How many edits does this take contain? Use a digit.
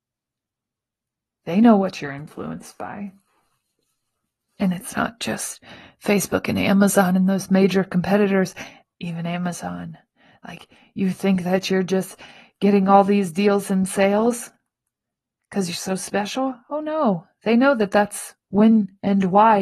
1